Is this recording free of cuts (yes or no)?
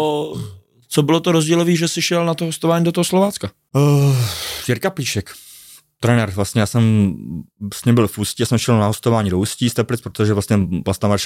yes